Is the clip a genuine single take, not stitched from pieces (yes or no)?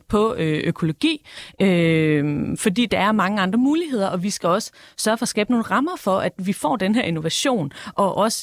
yes